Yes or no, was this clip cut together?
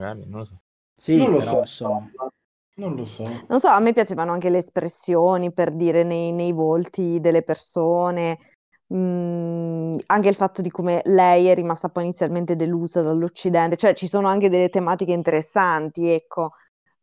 no